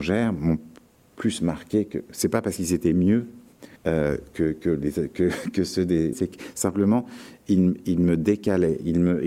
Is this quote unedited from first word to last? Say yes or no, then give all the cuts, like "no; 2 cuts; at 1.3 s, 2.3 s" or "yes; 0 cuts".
no; 2 cuts; at 3.8 s, 6.1 s